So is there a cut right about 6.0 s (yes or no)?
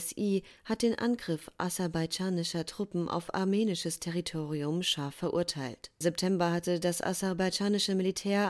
yes